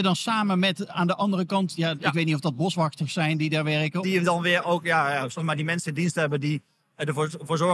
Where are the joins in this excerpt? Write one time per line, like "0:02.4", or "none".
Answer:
0:04.0
0:05.4